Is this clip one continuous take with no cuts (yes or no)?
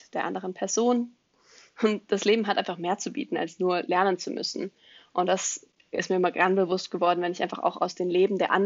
yes